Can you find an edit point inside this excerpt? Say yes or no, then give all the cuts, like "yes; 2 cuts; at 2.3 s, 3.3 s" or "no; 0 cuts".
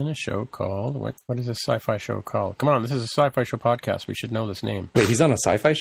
no; 0 cuts